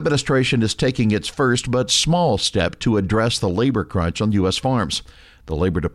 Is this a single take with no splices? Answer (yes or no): yes